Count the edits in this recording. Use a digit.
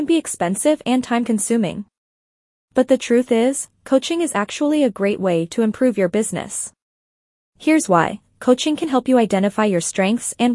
0